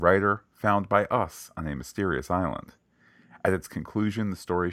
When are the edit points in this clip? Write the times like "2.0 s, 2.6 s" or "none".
none